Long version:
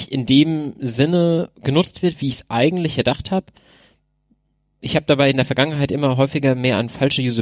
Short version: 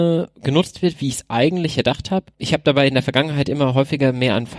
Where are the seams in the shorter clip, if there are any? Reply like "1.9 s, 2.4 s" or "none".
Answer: 2.3 s

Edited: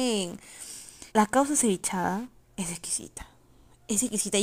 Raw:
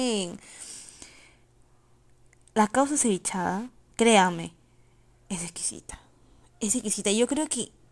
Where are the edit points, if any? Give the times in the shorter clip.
1.1 s, 2.4 s

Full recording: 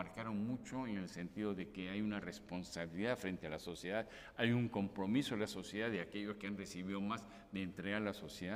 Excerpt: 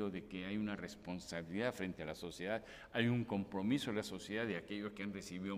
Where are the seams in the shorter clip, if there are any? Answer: none

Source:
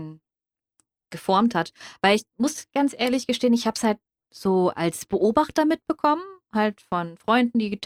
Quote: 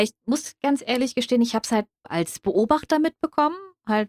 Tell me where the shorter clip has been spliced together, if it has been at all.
2.0 s

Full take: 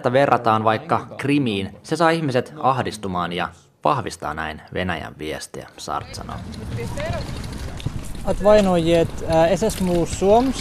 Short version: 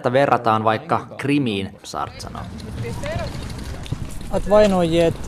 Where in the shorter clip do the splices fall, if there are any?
1.8 s

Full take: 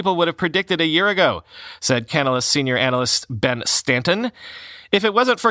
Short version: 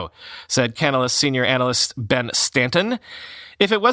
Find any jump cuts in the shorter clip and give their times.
none

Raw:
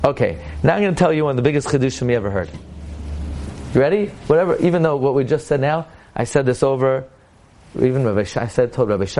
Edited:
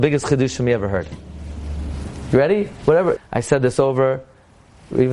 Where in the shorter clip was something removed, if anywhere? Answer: 3.2 s

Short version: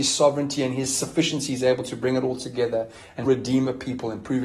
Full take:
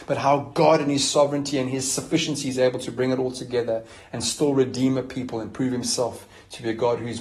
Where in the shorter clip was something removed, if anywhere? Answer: 3.3 s

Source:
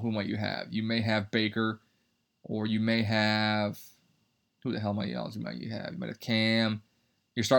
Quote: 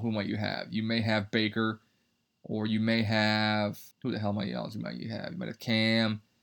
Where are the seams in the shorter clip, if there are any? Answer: 3.9 s

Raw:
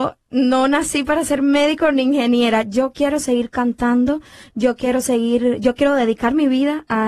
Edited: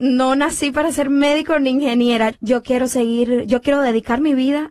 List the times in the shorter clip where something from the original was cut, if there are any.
2.3 s

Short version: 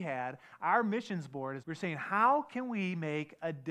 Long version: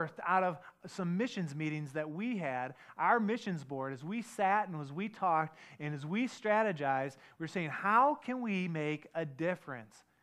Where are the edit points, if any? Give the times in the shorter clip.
1.6 s

